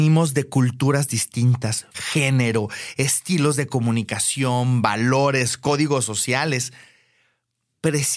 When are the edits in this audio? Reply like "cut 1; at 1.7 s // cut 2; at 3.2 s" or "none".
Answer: cut 1; at 1.9 s